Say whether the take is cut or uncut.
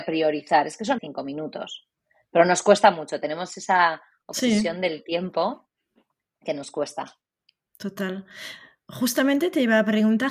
cut